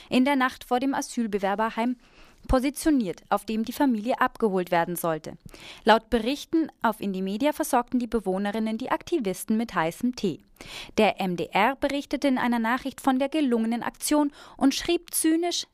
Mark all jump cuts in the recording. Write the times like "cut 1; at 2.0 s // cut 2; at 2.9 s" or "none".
none

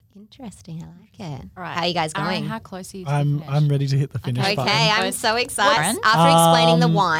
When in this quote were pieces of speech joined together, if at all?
cut 1; at 5.8 s

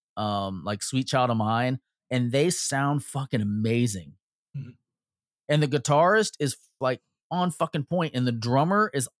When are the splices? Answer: none

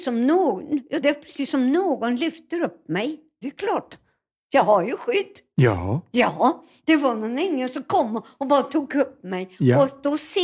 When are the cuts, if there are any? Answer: cut 1; at 1.0 s // cut 2; at 3.4 s

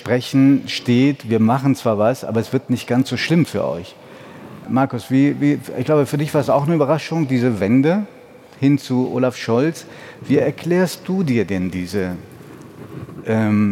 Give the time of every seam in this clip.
none

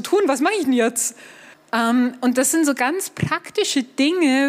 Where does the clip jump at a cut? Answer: cut 1; at 1.5 s

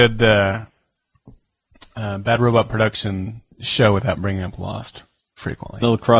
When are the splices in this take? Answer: cut 1; at 3.5 s

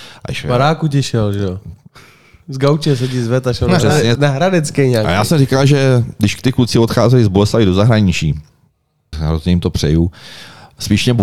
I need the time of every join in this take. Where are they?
cut 1; at 4.2 s // cut 2; at 9.1 s

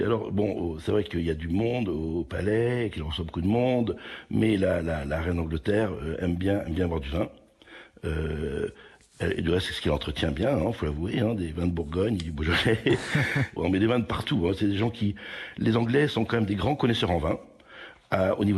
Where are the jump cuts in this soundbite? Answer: cut 1; at 13.6 s

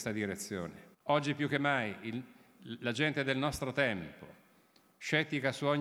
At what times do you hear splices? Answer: cut 1; at 0.9 s

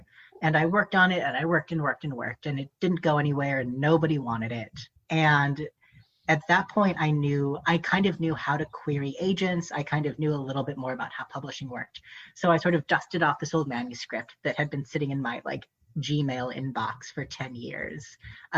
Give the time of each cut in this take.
cut 1; at 5.0 s

